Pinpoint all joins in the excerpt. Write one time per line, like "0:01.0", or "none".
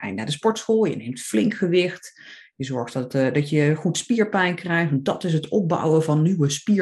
none